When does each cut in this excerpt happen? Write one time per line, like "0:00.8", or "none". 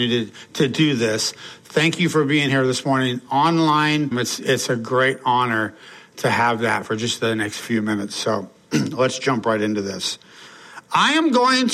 0:04.1